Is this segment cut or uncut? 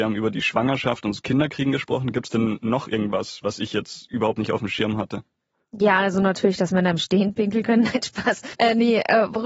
cut